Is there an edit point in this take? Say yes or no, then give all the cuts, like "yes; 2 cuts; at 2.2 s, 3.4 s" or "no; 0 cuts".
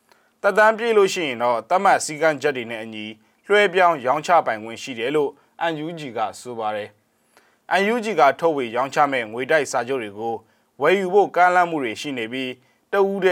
no; 0 cuts